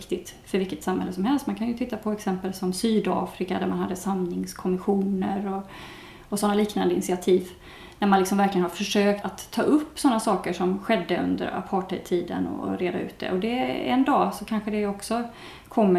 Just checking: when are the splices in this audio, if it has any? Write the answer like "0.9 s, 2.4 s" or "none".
9.2 s

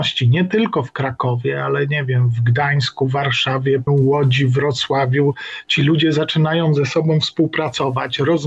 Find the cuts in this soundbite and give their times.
3.9 s

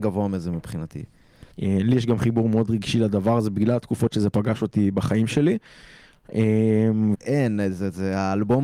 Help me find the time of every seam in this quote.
1.5 s, 7.1 s

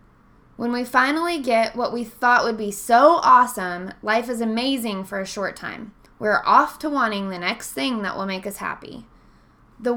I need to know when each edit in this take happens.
6.1 s

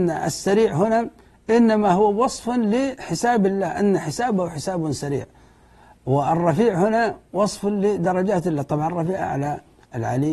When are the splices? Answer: 9.2 s

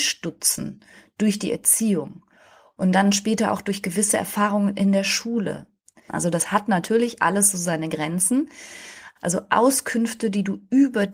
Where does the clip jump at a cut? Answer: 6.1 s, 9.2 s

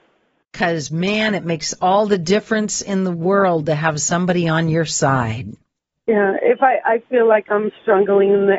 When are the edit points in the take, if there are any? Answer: none

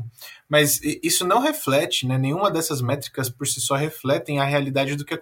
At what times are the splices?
none

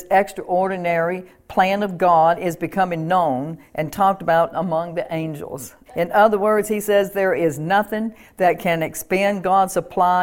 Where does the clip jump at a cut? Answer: 4.5 s, 5.9 s

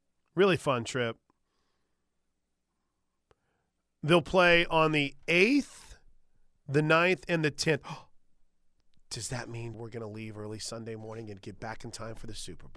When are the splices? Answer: 9.7 s

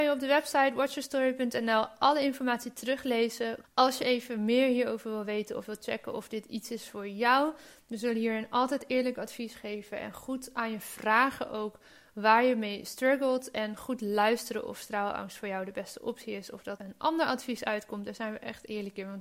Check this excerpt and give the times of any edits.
3.6 s, 16.8 s

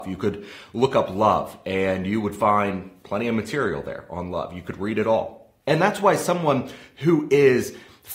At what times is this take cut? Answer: 5.6 s

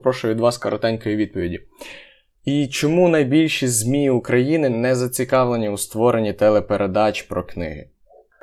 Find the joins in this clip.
2.3 s

